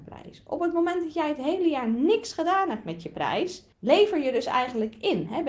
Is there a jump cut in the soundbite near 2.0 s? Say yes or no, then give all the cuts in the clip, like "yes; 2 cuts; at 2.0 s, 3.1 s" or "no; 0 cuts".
no; 1 cut; at 3.7 s